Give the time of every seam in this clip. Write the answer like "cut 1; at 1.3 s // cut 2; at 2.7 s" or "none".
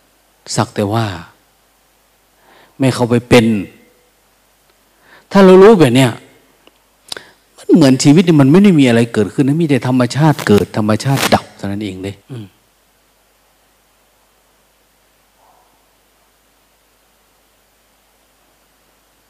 cut 1; at 12.2 s